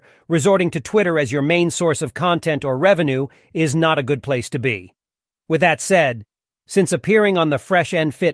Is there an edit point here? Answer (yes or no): yes